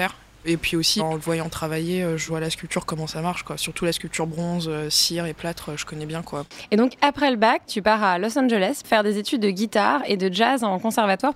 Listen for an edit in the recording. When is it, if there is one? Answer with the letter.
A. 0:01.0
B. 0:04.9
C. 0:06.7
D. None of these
A